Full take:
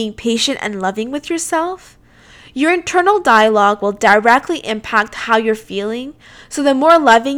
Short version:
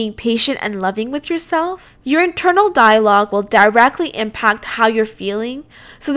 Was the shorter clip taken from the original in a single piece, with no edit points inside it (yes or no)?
no